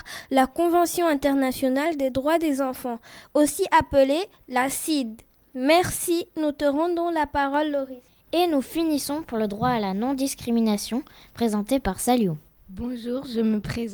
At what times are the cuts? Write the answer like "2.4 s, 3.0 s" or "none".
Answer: none